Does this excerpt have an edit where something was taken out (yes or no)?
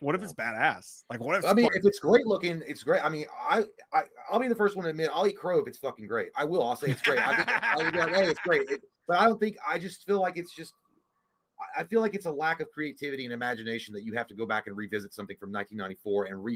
yes